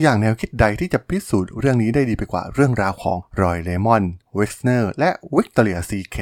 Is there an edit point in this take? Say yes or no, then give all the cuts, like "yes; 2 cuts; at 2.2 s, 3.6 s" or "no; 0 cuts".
no; 0 cuts